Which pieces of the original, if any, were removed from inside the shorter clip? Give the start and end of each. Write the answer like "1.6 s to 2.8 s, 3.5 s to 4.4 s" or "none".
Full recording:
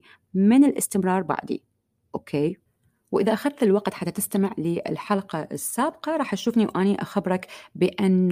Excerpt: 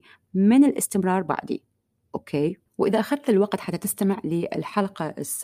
2.7 s to 3.0 s